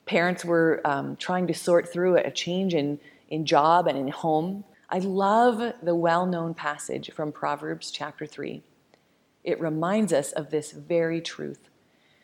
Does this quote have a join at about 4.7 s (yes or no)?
yes